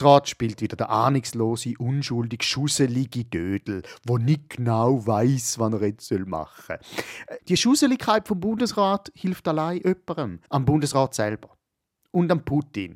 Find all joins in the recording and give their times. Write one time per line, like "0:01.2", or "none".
0:07.4
0:10.5